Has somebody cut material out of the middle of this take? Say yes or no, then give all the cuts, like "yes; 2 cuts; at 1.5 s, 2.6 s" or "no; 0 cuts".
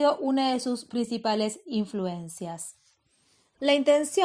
no; 0 cuts